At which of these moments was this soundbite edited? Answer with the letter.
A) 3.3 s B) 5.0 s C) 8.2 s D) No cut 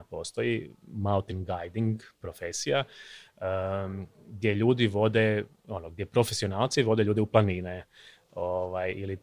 D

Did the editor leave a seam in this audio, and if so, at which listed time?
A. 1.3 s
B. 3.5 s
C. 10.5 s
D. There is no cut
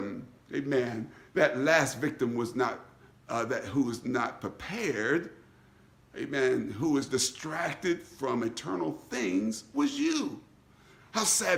D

